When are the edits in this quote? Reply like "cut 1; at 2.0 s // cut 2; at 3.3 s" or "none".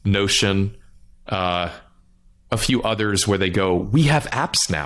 cut 1; at 1.1 s